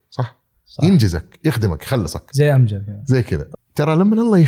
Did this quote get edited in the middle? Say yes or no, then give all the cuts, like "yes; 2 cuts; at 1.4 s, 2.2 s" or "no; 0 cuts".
yes; 1 cut; at 3.5 s